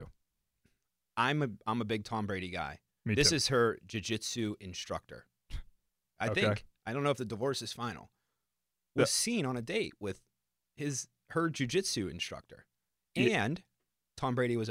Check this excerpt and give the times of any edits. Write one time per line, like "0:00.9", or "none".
0:06.0